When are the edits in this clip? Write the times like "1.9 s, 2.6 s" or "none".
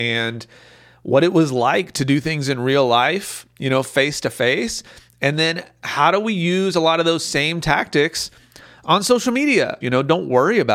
9.8 s